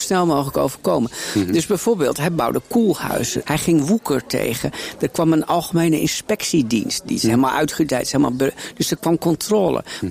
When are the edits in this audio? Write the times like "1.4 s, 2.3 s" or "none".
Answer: 3.4 s, 9.0 s